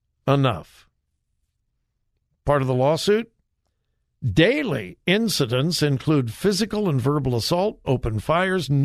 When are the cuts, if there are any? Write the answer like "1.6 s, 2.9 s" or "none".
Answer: 7.8 s